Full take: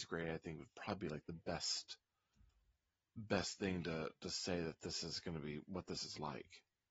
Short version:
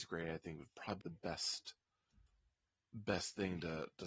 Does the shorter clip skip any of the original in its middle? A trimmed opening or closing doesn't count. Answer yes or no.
yes